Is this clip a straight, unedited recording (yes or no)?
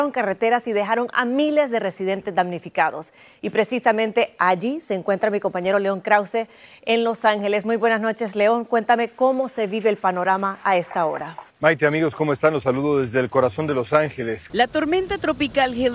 no